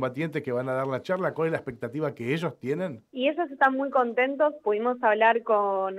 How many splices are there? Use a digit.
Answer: 1